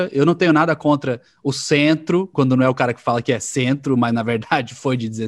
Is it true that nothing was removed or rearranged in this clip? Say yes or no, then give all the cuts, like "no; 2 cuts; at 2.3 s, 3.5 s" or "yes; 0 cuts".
no; 1 cut; at 2.3 s